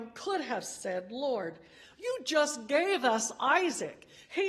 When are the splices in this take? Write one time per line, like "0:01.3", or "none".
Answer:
none